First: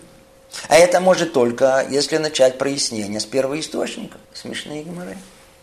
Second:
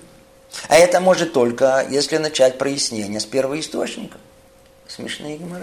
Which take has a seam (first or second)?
first